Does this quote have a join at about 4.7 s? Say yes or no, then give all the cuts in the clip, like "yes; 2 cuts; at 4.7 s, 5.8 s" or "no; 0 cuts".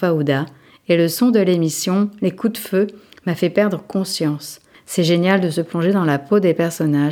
yes; 1 cut; at 4.7 s